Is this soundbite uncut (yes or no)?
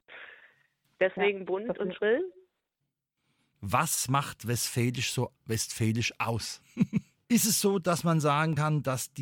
no